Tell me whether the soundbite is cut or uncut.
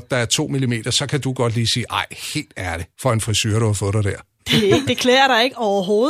cut